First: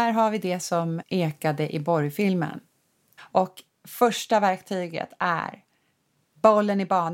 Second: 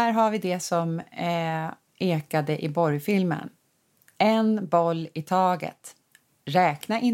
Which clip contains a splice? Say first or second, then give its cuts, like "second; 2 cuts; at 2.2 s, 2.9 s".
first; 2 cuts; at 1.0 s, 3.2 s